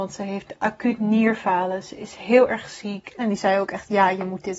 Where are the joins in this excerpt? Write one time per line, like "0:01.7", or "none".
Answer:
0:03.2